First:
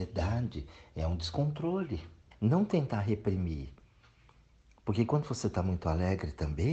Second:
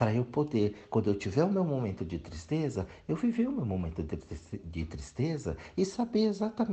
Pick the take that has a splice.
first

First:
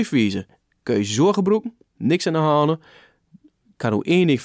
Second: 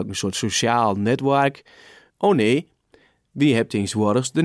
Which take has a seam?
second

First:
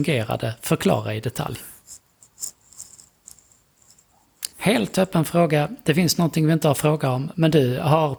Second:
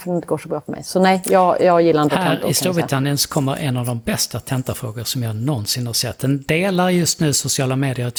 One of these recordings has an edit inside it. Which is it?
first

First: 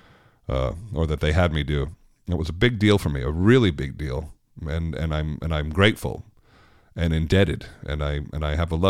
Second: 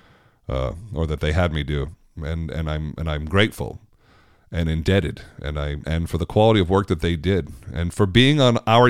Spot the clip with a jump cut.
second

